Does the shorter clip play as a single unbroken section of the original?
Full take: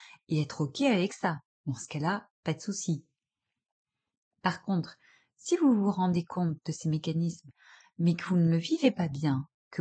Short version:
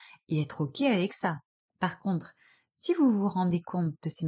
no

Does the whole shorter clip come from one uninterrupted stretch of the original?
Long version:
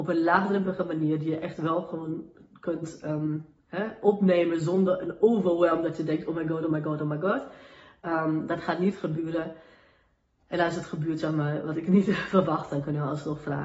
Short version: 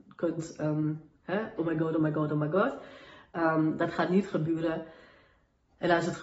no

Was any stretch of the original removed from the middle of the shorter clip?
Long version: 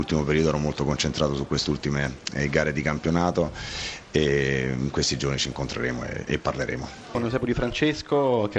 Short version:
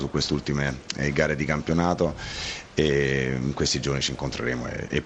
no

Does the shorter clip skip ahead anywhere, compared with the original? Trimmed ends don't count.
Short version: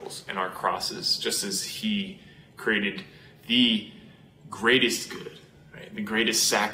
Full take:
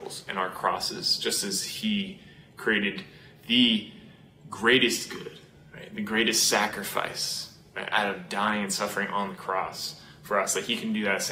no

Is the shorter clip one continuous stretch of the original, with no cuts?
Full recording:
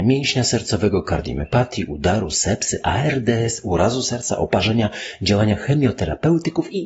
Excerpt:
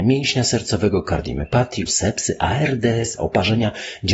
no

